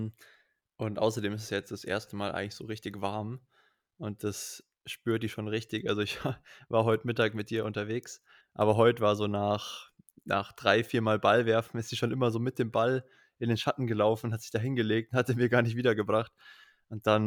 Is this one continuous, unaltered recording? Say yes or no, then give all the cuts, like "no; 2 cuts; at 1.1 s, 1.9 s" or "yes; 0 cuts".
no; 1 cut; at 8.4 s